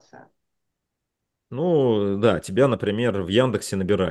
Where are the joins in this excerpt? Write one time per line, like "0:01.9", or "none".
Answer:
none